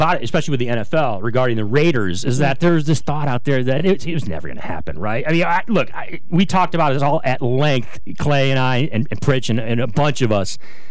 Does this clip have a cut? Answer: no; 0 cuts

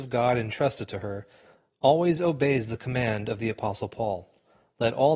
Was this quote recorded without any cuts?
yes; 0 cuts

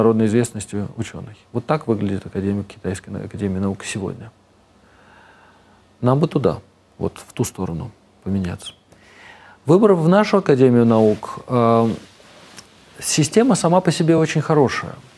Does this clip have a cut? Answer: no; 0 cuts

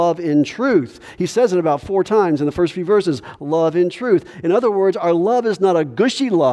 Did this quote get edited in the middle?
no; 0 cuts

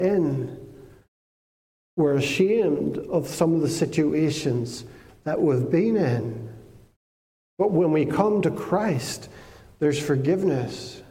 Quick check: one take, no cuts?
yes; 0 cuts

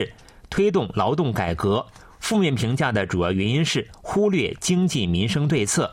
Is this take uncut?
yes; 0 cuts

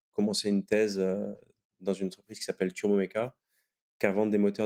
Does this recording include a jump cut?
no; 0 cuts

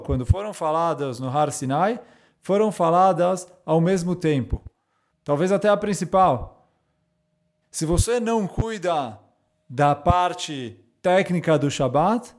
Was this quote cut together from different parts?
yes; 2 cuts; at 5.1 s, 7.6 s

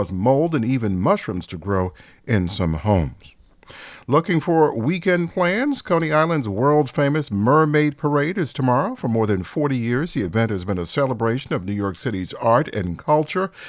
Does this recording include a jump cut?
no; 0 cuts

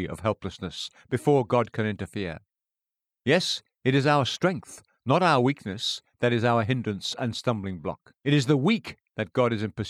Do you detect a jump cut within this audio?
yes; 1 cut; at 8.2 s

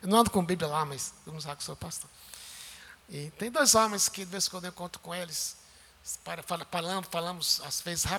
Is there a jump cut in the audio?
yes; 1 cut; at 3.0 s

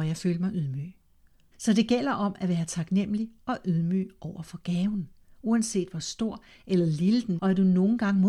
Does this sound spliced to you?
yes; 2 cuts; at 1.5 s, 7.4 s

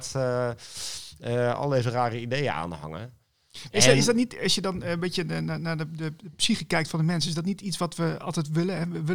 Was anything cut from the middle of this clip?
no; 0 cuts

